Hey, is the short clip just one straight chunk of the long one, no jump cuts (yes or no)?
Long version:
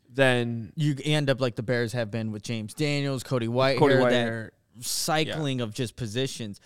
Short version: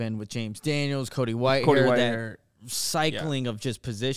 yes